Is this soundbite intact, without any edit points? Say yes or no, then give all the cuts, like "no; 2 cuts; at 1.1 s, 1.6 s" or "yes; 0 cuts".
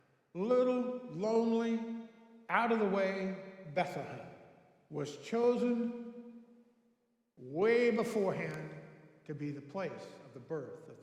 yes; 0 cuts